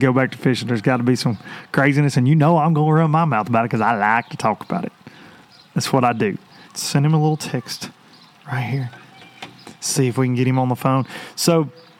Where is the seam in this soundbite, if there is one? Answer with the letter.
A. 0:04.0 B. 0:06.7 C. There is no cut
B